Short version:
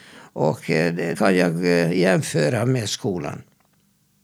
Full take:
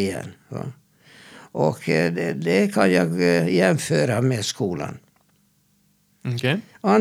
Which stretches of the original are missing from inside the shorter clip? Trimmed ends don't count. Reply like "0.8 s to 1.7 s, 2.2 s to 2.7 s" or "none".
2.3 s to 2.7 s

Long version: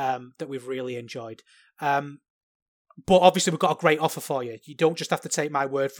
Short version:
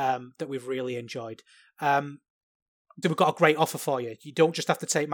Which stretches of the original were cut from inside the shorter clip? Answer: 3.0 s to 3.4 s

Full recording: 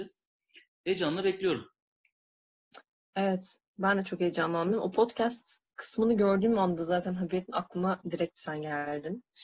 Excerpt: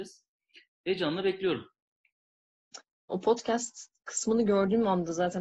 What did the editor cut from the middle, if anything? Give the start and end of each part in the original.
3.1 s to 4.8 s

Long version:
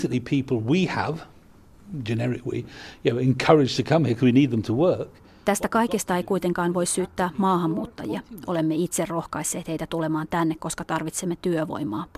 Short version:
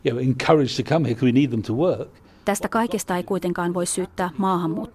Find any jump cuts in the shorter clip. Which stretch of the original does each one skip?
none

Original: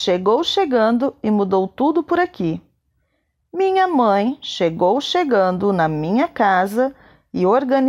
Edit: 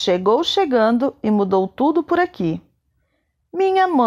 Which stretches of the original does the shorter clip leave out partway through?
none

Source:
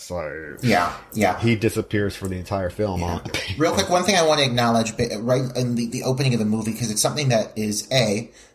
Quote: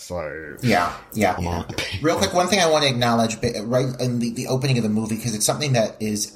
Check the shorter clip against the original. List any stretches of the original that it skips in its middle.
1.4 s to 2.9 s

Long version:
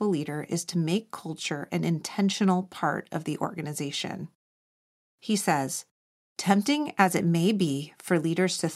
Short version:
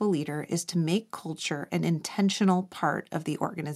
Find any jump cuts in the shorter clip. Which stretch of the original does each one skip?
none

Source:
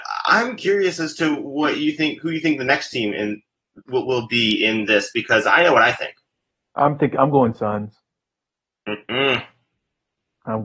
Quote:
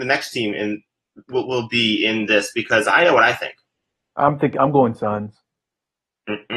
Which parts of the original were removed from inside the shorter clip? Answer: none

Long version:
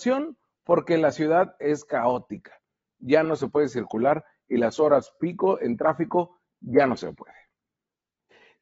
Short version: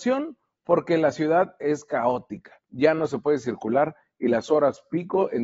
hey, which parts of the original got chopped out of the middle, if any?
2.7 s to 2.9 s

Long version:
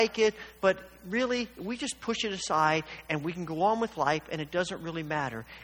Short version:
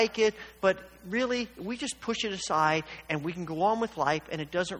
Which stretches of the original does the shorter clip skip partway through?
none

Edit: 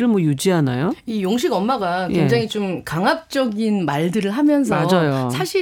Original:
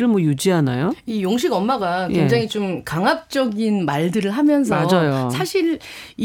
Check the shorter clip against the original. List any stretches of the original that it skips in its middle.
none

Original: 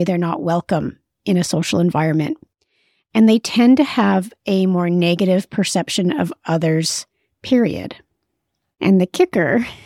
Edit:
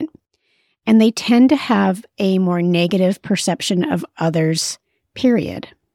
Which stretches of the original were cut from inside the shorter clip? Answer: none

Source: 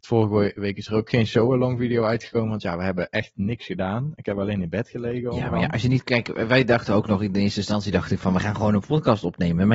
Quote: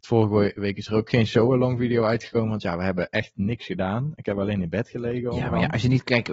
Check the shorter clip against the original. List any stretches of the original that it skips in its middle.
none

